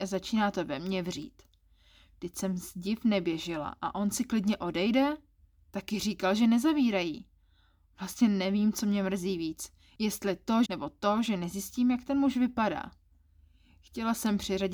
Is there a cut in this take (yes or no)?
yes